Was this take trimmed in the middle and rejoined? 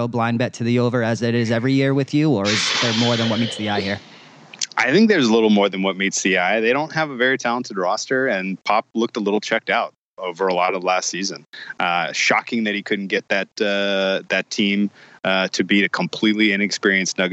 no; 0 cuts

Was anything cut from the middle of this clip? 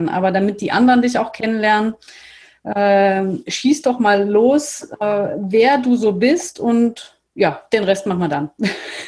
no; 0 cuts

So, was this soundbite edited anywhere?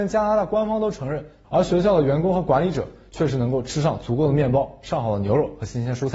yes; 1 cut; at 1.4 s

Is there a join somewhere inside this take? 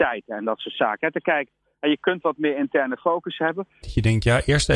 yes; 1 cut; at 3.8 s

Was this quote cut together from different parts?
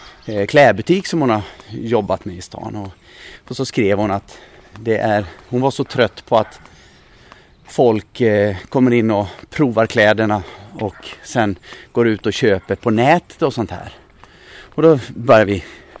no; 0 cuts

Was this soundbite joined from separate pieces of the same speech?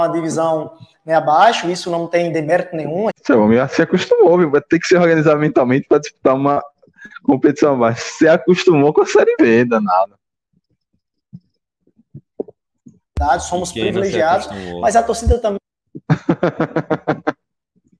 yes; 1 cut; at 3.1 s

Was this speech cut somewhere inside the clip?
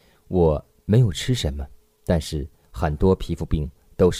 no; 0 cuts

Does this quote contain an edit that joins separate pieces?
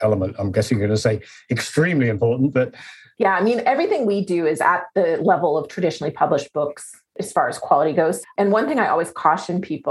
yes; 1 cut; at 8.2 s

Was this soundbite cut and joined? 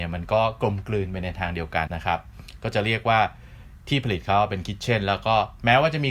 yes; 1 cut; at 1.9 s

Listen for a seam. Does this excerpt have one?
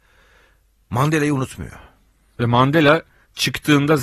no; 0 cuts

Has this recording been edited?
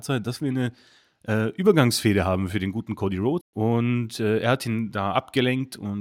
yes; 1 cut; at 3.4 s

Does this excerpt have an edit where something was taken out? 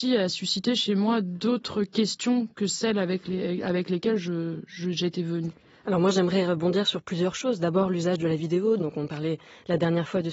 yes; 1 cut; at 8.8 s

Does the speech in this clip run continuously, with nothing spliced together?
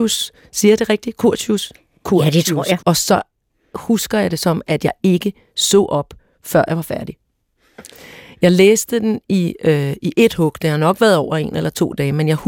no; 1 cut; at 2.8 s

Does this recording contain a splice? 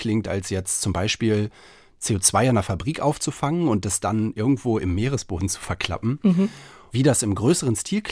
no; 0 cuts

